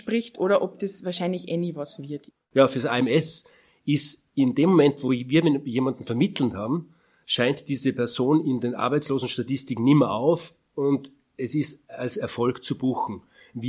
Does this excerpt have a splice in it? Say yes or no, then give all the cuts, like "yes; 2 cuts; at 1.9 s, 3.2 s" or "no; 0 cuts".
no; 0 cuts